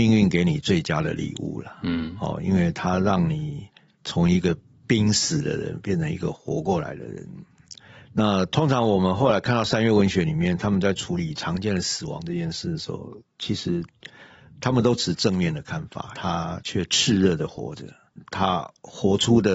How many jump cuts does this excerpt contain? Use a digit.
1